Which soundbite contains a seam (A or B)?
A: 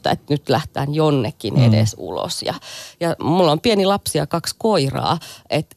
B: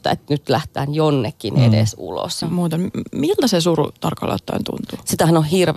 B